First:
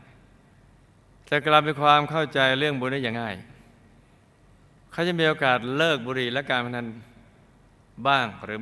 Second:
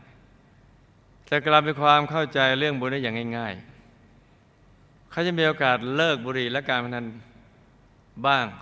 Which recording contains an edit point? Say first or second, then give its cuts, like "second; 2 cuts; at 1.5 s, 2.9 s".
first; 1 cut; at 3.1 s